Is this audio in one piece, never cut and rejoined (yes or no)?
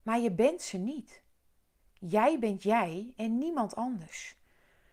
yes